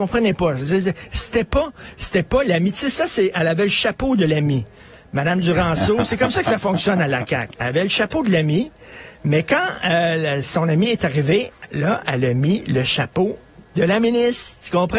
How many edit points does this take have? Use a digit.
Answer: 1